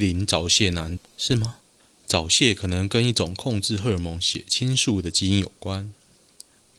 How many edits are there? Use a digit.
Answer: 1